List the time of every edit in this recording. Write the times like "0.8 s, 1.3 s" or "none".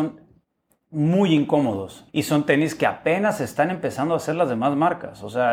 2.1 s